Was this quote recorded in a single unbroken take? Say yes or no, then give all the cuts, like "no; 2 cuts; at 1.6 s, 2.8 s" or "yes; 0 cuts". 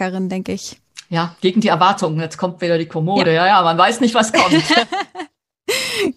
yes; 0 cuts